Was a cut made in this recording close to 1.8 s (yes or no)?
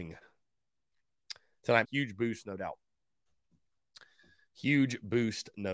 yes